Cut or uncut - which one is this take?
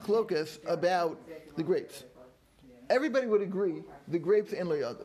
uncut